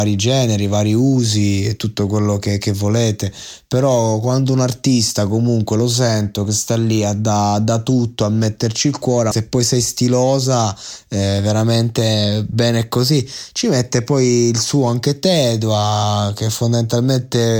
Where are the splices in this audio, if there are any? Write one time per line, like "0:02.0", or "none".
0:09.3